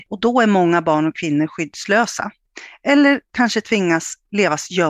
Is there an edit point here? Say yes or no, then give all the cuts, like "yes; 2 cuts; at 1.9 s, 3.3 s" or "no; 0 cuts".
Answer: no; 0 cuts